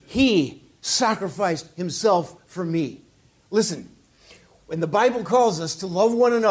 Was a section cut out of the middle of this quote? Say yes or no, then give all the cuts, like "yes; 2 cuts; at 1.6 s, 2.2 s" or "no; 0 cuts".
no; 0 cuts